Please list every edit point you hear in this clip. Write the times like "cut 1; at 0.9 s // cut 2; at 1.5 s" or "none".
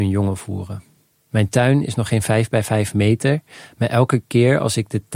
cut 1; at 1.2 s